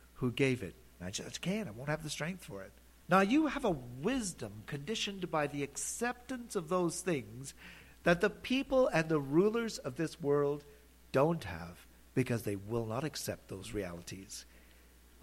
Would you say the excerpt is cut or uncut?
cut